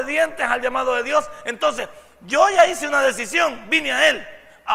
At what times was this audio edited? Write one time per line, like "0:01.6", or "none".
none